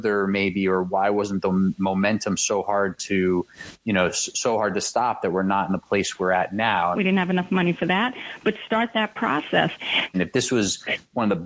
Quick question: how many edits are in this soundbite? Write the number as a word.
two